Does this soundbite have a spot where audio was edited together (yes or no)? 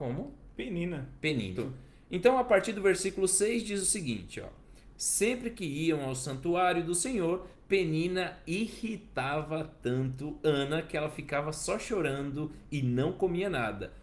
yes